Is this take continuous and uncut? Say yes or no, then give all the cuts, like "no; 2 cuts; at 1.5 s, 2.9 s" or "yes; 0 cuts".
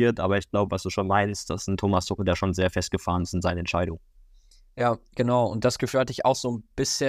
yes; 0 cuts